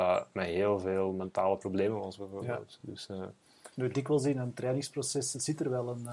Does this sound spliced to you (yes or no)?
no